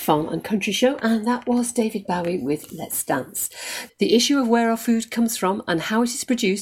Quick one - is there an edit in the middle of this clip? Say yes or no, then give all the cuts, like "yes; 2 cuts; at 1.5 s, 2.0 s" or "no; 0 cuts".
yes; 1 cut; at 3.9 s